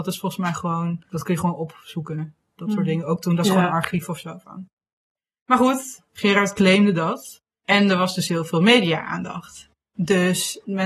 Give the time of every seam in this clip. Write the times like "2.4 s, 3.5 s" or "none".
none